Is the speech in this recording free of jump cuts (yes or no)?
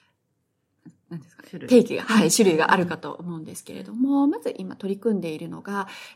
yes